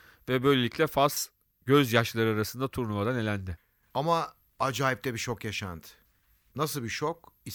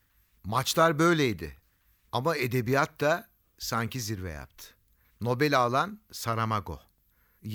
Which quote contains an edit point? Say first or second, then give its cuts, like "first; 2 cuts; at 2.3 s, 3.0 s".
second; 1 cut; at 5.1 s